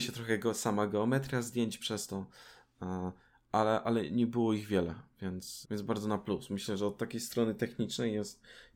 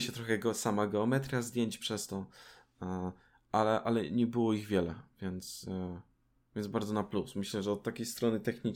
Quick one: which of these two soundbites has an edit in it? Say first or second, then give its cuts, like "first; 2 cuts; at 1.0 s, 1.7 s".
first; 1 cut; at 5.6 s